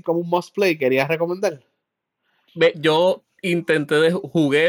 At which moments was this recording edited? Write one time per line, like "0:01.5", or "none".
0:02.5